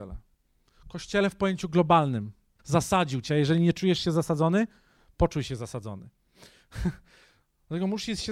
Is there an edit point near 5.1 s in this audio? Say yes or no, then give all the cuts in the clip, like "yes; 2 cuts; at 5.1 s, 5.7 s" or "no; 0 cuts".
no; 1 cut; at 2.6 s